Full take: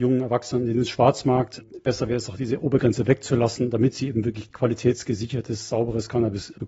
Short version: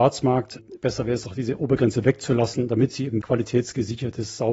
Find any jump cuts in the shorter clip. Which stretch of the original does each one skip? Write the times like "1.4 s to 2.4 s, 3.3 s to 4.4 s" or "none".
4.2 s to 4.5 s

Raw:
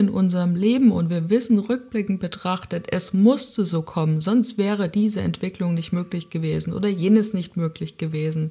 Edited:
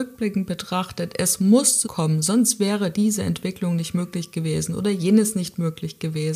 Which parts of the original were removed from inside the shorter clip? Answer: 3.6 s to 3.8 s

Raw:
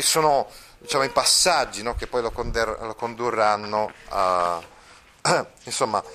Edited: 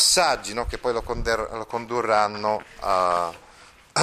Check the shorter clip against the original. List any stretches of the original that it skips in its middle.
none

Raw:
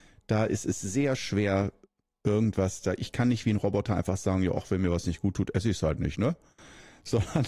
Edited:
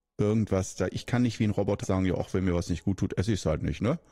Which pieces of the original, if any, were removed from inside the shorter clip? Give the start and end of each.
3.9 s to 4.2 s

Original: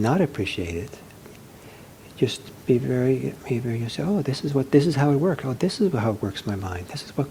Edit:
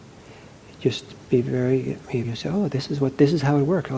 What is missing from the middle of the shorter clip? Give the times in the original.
3.6 s to 3.8 s

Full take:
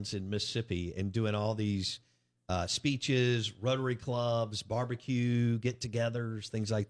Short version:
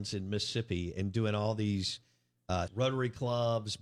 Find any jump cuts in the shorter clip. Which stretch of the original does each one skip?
2.7 s to 3.5 s

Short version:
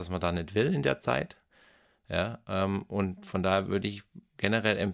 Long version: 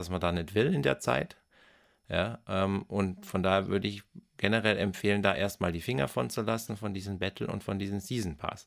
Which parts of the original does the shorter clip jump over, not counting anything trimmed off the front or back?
none

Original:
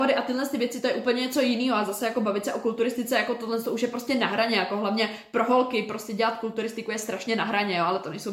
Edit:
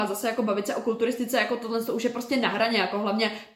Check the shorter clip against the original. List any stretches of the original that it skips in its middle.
none

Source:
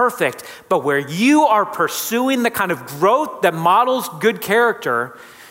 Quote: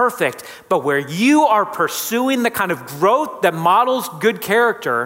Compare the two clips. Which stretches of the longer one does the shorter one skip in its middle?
none

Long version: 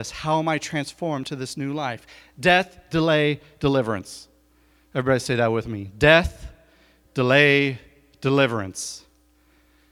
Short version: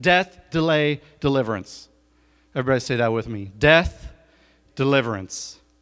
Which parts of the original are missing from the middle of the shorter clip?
7.1 s to 8.1 s

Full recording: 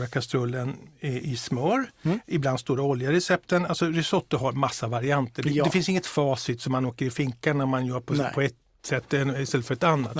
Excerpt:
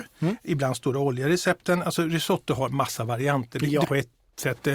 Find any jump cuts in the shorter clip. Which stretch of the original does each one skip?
5.7 s to 8.3 s

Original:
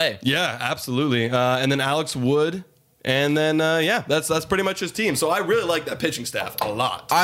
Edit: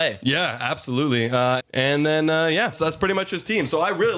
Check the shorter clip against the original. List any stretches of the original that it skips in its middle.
1.6 s to 2.9 s, 4.0 s to 4.2 s

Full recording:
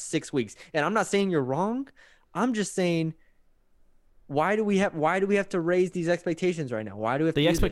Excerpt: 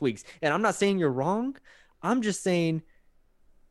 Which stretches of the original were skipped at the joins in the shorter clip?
none

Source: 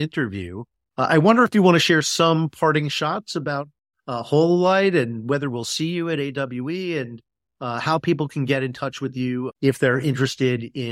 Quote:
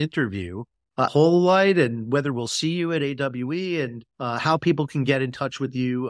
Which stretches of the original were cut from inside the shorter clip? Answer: 1.1 s to 4.2 s, 7.3 s to 7.5 s

